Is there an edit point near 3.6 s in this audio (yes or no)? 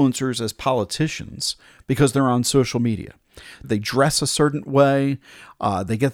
yes